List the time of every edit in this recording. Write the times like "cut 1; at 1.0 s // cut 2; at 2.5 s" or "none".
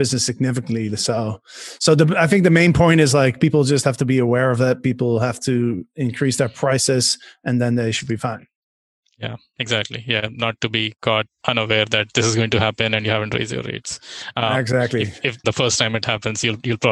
cut 1; at 15.4 s